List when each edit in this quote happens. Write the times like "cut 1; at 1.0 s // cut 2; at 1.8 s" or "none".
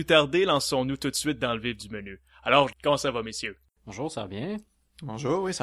cut 1; at 2.7 s